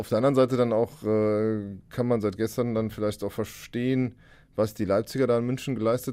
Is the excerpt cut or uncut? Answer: uncut